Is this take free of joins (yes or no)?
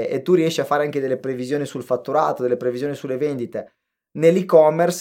yes